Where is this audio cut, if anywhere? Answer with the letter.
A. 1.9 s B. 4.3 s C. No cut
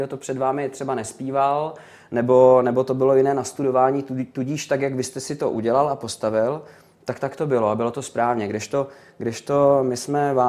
C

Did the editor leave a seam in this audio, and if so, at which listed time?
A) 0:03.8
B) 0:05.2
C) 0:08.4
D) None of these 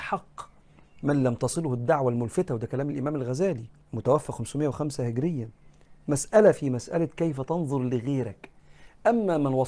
A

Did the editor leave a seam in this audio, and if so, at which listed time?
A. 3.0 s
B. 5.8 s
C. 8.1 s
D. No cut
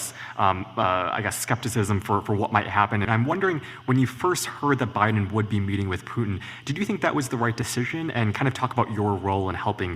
A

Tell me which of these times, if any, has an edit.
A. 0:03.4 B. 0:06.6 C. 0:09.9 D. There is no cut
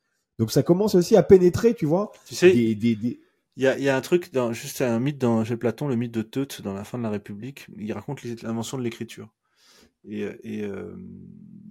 D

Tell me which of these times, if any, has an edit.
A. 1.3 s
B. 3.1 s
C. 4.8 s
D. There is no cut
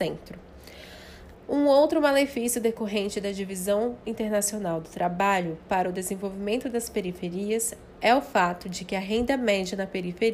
A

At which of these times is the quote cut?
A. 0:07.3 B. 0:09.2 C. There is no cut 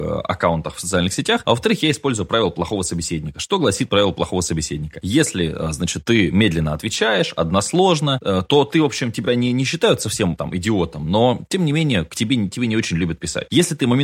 C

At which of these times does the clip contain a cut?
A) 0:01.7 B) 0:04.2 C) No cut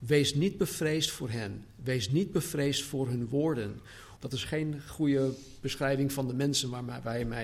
B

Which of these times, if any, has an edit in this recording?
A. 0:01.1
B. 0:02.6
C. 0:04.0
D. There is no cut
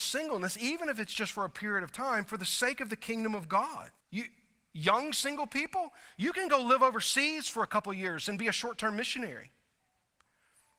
C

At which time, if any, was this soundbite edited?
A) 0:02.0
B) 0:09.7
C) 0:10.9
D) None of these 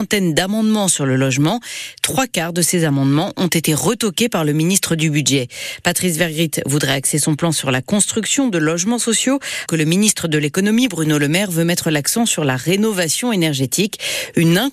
B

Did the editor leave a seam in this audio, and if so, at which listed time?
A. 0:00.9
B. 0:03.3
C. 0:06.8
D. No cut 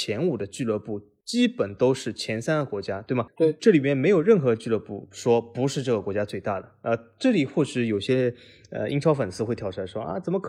B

